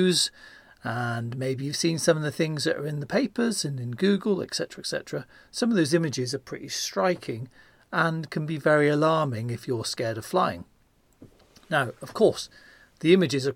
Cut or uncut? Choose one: uncut